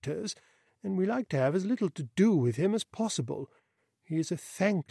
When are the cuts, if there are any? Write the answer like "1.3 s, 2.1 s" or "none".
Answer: none